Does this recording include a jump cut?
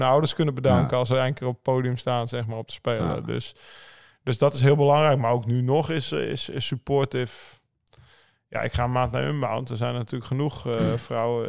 no; 0 cuts

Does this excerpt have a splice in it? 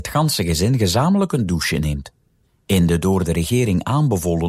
no; 0 cuts

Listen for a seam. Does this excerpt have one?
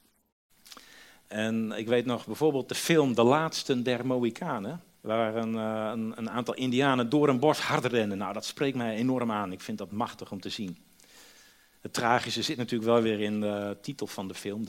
yes; 1 cut; at 5.0 s

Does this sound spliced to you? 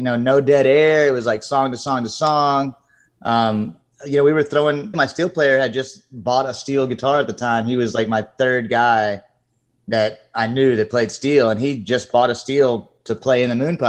yes; 1 cut; at 4.9 s

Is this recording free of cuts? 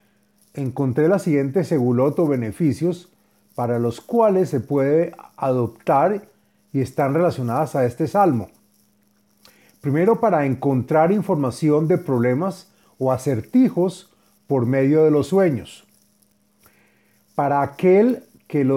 yes; 0 cuts

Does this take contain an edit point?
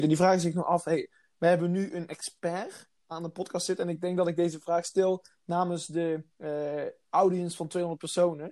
yes; 2 cuts; at 3.0 s, 6.3 s

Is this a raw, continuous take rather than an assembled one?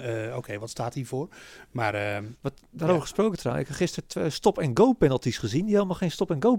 yes; 0 cuts

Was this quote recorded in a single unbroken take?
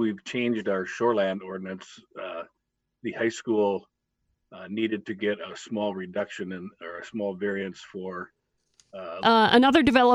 no; 1 cut; at 9.2 s

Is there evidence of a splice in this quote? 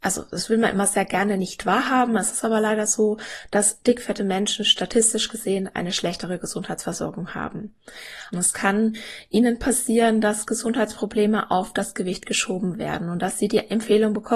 yes; 1 cut; at 8.3 s

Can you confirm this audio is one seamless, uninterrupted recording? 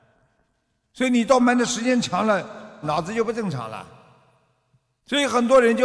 no; 2 cuts; at 1.4 s, 2.8 s

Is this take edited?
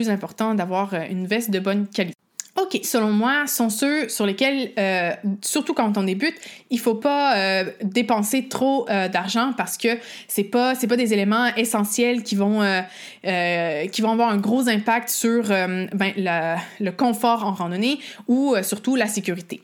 yes; 1 cut; at 2.8 s

